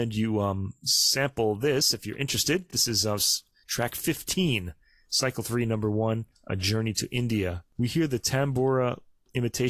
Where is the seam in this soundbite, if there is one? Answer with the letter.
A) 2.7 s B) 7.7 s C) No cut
C